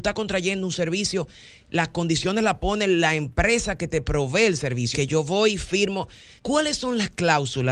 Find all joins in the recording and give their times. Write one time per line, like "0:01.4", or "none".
0:04.9
0:06.4